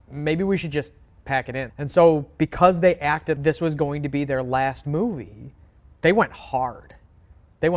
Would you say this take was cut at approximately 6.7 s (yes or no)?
no